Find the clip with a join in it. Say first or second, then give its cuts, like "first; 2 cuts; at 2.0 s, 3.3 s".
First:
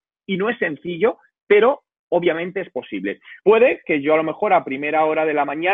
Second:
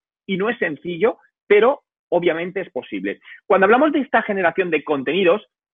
first; 1 cut; at 3.4 s